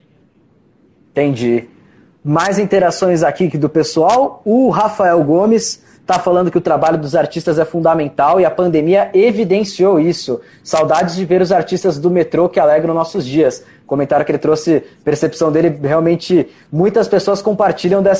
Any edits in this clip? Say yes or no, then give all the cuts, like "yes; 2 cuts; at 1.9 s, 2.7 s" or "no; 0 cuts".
no; 0 cuts